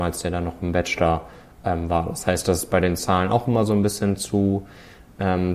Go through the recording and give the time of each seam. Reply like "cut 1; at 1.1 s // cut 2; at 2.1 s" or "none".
none